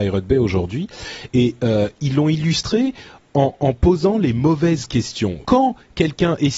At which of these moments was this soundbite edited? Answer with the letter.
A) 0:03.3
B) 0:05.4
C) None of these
B